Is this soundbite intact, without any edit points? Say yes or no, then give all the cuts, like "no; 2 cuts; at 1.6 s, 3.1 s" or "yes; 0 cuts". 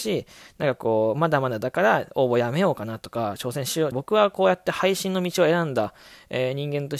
no; 1 cut; at 3.9 s